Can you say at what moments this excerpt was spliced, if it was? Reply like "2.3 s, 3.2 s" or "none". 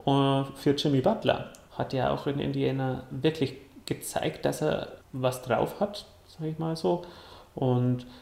1.7 s, 5.0 s